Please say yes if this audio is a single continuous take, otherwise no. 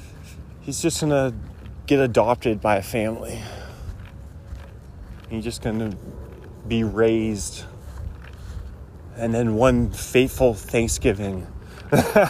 yes